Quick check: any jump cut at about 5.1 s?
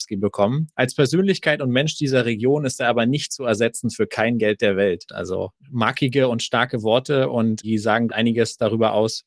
yes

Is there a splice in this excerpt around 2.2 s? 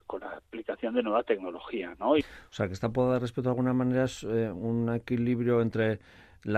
yes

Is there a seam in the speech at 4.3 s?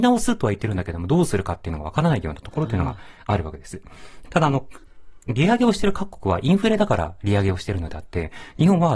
yes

